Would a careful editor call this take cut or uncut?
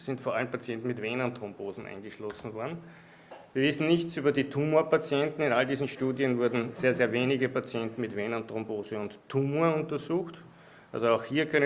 uncut